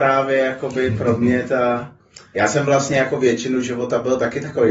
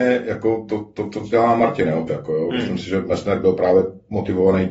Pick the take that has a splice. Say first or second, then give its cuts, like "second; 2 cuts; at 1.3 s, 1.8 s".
second; 1 cut; at 2.1 s